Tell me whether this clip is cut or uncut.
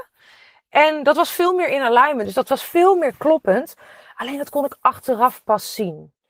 cut